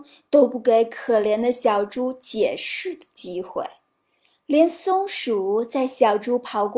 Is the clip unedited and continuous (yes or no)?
yes